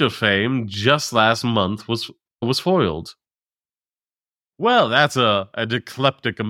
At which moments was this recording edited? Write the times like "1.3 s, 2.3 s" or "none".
none